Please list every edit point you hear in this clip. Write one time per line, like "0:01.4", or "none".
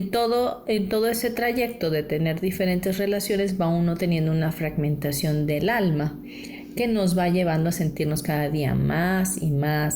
none